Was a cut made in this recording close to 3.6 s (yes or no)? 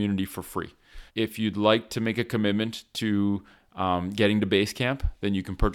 no